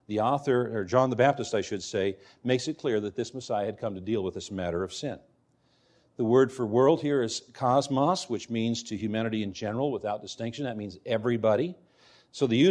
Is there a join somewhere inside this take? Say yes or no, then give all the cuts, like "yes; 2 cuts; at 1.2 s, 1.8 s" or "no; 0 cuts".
no; 0 cuts